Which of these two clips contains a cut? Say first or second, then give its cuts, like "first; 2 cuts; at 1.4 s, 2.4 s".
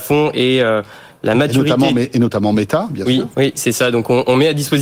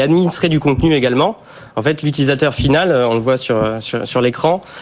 first; 1 cut; at 3.3 s